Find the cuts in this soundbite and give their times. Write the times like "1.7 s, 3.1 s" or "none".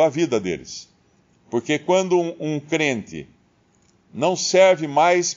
none